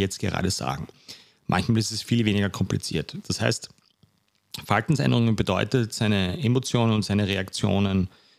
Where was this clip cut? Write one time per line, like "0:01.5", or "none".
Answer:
0:03.2